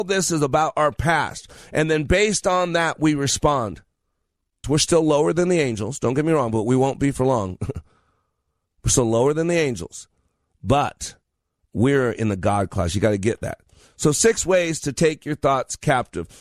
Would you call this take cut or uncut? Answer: cut